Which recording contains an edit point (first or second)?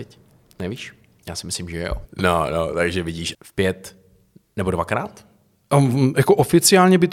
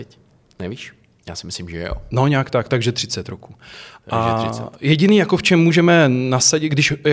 first